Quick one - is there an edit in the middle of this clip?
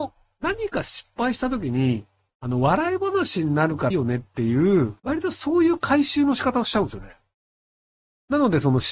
yes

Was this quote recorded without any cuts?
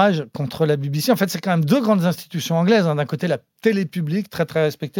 yes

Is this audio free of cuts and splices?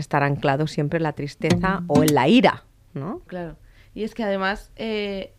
no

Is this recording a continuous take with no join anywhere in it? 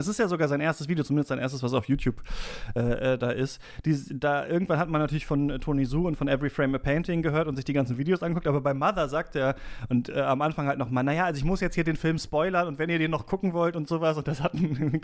yes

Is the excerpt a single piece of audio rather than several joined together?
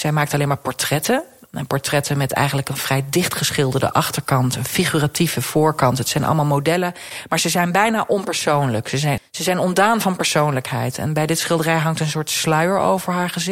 no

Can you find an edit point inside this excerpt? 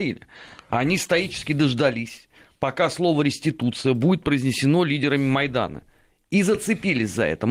no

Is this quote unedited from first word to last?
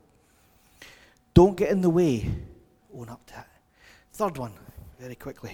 no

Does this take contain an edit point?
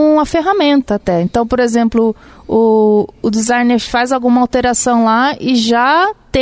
no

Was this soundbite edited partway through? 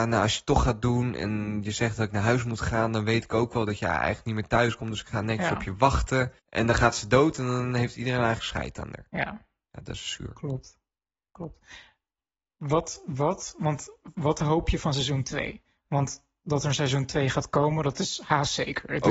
yes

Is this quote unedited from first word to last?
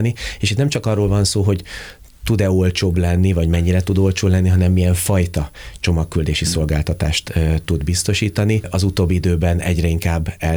yes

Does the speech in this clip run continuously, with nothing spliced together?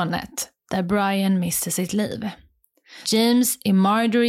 no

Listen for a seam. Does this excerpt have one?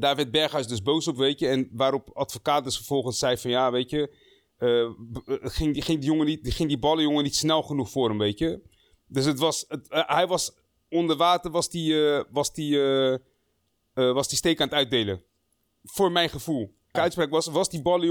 yes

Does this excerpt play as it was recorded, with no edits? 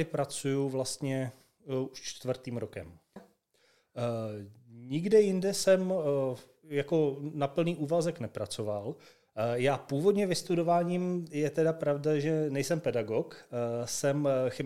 no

